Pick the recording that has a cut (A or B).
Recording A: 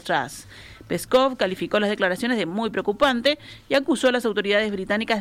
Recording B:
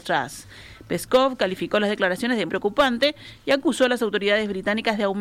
B